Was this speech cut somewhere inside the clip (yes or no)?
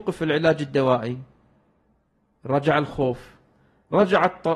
no